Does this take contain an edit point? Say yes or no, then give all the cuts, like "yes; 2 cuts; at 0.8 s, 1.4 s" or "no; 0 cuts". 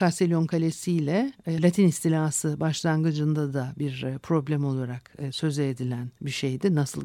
yes; 1 cut; at 1.6 s